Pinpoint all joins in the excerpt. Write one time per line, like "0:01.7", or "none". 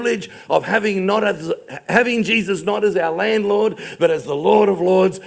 none